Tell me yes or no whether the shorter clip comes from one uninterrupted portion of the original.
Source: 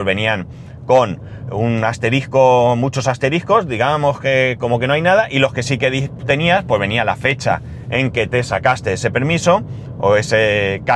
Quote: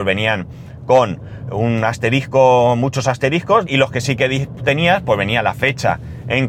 no